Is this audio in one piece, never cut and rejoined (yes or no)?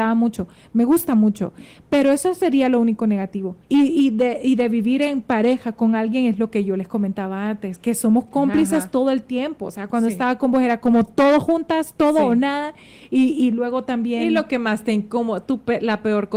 no